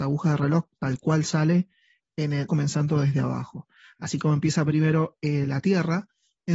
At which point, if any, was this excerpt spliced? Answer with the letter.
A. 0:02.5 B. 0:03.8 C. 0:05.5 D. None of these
A